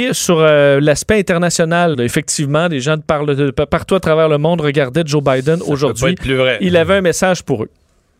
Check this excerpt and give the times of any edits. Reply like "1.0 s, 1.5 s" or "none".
1.9 s

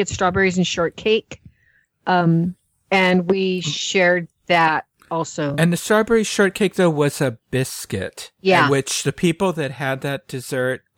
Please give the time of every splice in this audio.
none

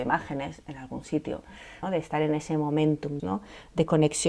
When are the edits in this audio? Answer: 1.8 s, 3.2 s

